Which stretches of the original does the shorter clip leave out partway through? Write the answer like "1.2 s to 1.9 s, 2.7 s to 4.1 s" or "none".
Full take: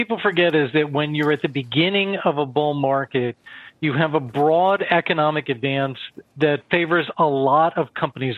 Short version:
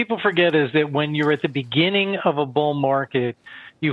none